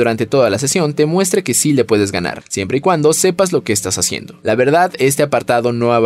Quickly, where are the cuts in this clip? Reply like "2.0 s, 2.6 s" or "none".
4.4 s